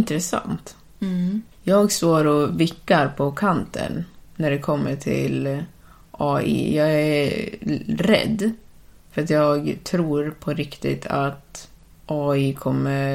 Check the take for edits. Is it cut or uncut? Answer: cut